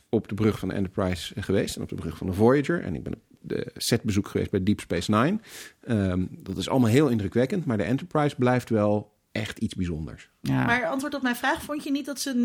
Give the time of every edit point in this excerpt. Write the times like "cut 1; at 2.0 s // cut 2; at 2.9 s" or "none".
none